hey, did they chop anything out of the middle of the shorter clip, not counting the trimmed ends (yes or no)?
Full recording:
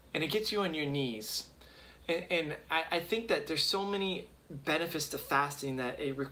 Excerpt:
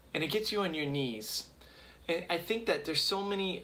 yes